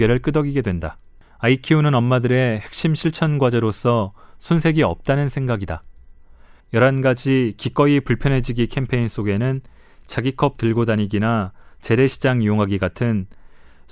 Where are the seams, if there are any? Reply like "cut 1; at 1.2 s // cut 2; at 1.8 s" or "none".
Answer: cut 1; at 1.2 s // cut 2; at 6.6 s